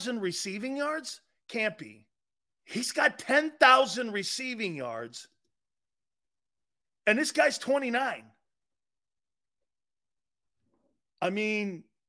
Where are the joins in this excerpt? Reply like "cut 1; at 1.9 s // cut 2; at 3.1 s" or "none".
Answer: cut 1; at 2.5 s